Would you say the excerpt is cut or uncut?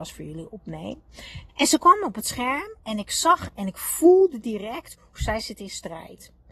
cut